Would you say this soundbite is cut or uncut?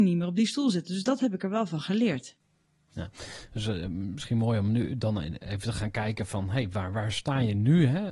uncut